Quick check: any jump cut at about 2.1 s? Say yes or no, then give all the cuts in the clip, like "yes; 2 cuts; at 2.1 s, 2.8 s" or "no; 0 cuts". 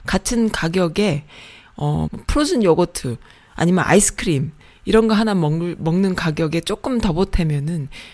yes; 1 cut; at 2.1 s